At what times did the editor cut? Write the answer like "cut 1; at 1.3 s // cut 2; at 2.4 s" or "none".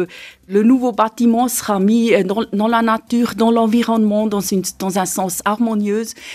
none